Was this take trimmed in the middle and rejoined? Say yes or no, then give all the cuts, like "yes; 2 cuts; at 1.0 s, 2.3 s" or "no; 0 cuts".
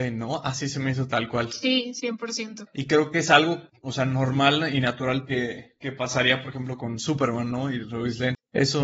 yes; 1 cut; at 2.7 s